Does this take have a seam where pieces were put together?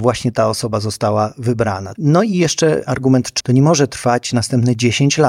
yes; 2 cuts; at 1.9 s, 3.4 s

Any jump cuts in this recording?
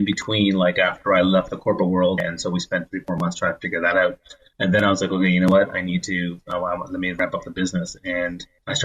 yes; 1 cut; at 2.2 s

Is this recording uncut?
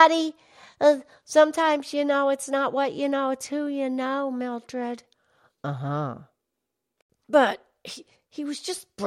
yes; 0 cuts

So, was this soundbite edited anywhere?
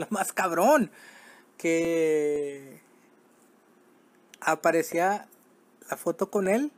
no; 0 cuts

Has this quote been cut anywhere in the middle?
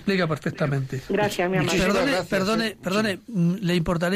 no; 0 cuts

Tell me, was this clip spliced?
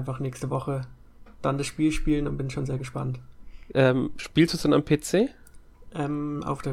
no; 0 cuts

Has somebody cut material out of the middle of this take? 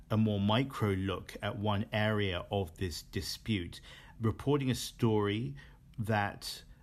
yes; 1 cut; at 4.2 s

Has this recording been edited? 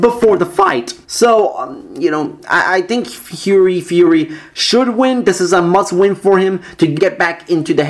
yes; 2 cuts; at 1.0 s, 7.0 s

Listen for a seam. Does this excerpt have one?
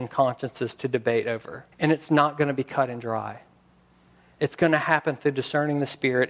yes; 1 cut; at 1.7 s

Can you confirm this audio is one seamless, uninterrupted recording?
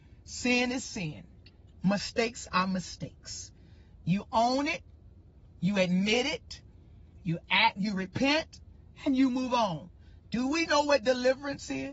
yes; 0 cuts

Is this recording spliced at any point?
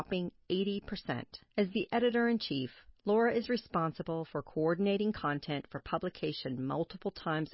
yes; 1 cut; at 1.5 s

